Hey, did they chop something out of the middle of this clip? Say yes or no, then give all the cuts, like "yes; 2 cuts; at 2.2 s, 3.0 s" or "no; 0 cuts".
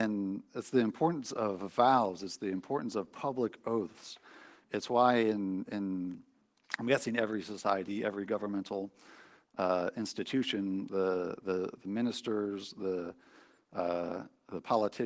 no; 0 cuts